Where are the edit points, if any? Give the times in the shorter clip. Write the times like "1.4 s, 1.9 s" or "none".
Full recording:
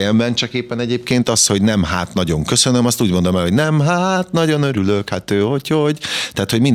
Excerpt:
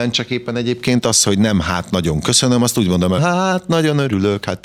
3.2 s